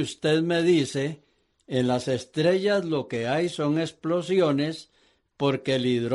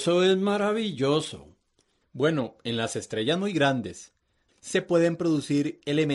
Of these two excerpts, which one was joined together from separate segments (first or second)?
second